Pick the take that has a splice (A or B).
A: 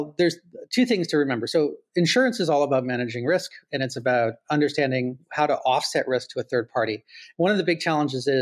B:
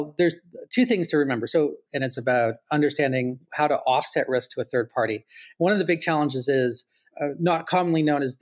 B